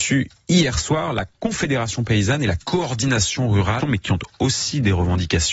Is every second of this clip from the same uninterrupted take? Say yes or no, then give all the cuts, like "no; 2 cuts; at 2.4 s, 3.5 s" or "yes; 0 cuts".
no; 1 cut; at 3.8 s